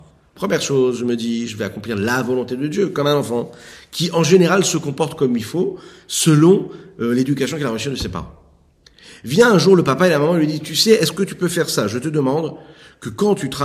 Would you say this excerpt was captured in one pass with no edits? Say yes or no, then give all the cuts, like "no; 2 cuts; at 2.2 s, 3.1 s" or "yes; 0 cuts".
yes; 0 cuts